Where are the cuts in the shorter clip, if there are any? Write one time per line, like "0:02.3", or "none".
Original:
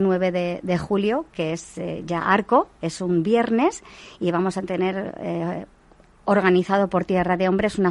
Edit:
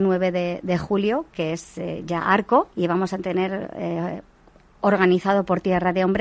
0:02.7